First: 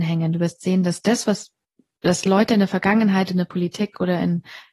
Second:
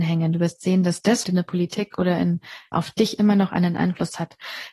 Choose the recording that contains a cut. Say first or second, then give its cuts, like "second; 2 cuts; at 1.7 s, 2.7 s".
second; 2 cuts; at 1.2 s, 2.7 s